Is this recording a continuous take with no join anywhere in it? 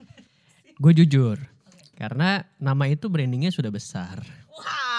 yes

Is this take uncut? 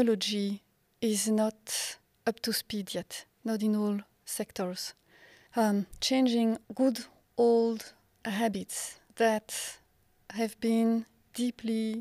no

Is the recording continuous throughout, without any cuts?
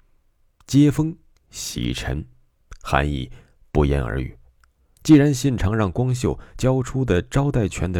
no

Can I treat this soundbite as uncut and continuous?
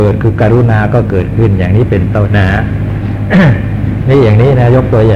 no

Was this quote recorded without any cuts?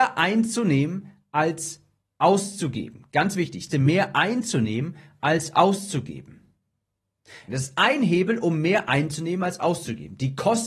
no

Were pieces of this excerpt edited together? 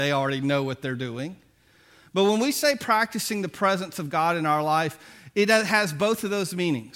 no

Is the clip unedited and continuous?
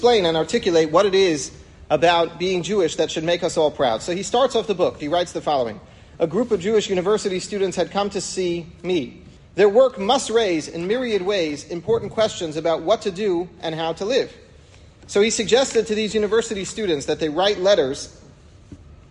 no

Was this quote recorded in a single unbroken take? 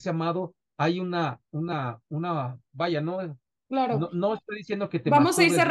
yes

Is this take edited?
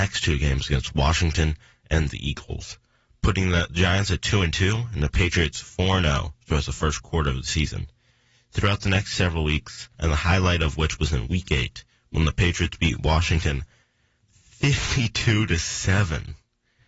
yes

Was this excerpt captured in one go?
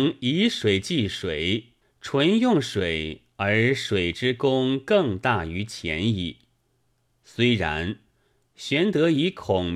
no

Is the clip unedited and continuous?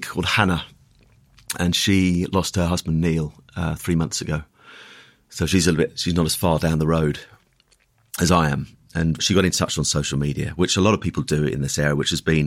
yes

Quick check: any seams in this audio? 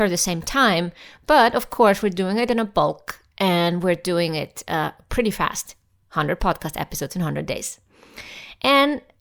no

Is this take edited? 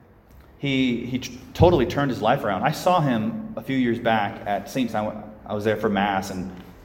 yes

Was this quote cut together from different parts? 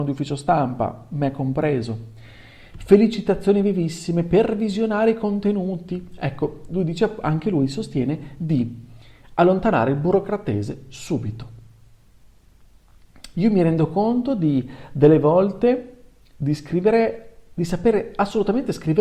yes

